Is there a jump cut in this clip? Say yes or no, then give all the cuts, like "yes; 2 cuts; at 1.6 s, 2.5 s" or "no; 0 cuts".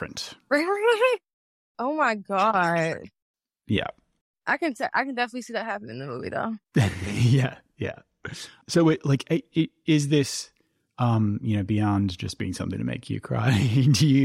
no; 0 cuts